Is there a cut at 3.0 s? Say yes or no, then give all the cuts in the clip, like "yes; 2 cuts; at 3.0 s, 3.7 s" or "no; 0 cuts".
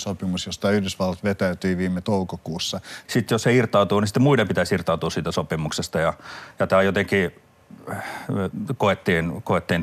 yes; 1 cut; at 3.0 s